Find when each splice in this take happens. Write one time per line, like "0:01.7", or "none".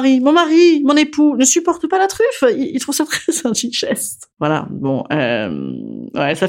none